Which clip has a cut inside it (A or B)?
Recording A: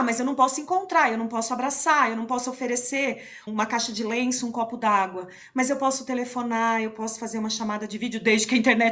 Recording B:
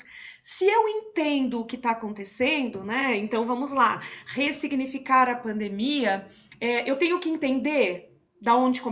A